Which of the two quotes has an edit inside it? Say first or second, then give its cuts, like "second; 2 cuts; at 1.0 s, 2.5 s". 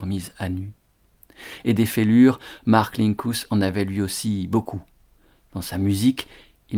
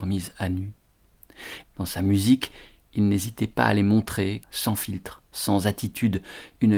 second; 2 cuts; at 1.6 s, 4.4 s